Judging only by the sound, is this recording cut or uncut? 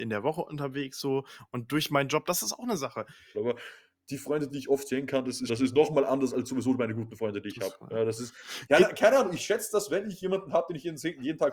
cut